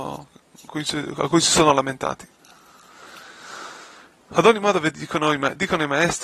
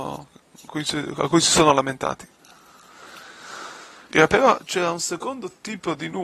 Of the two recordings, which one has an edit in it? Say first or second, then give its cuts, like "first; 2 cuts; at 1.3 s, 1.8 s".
second; 1 cut; at 4.1 s